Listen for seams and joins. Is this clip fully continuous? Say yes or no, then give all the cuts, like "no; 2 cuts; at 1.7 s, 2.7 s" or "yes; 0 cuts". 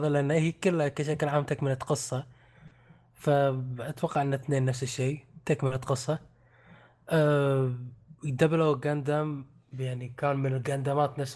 yes; 0 cuts